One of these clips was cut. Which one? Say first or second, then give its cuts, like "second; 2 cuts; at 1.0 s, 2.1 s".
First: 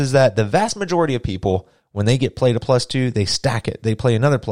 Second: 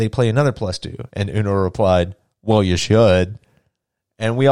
second; 1 cut; at 1.1 s